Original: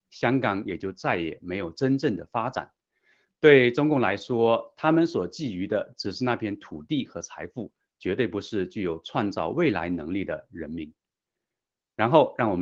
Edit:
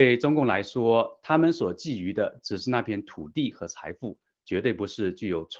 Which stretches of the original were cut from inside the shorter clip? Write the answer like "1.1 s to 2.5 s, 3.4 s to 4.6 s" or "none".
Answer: none